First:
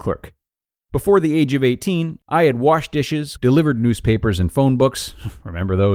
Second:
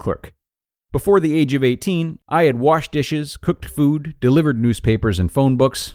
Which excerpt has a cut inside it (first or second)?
first